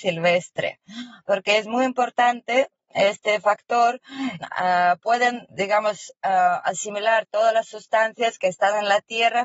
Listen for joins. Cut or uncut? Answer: cut